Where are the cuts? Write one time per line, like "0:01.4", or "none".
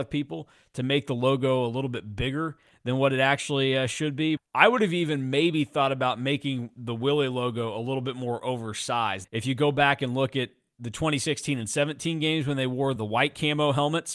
0:04.4
0:09.2
0:13.0

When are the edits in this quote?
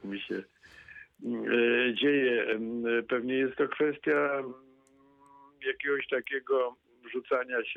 none

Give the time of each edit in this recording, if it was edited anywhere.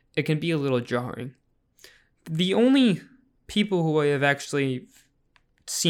none

